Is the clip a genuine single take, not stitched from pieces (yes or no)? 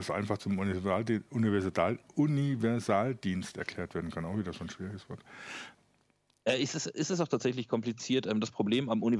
yes